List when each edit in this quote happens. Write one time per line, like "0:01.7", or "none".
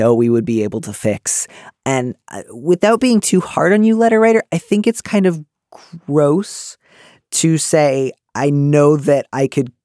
0:01.7